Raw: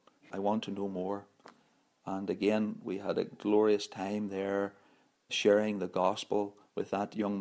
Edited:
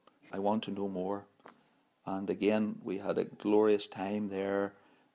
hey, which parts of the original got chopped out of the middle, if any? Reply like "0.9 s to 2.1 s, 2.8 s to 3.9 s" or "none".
none